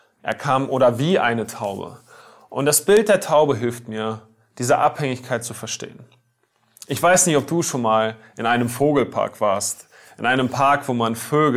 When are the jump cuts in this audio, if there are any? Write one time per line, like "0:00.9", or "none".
none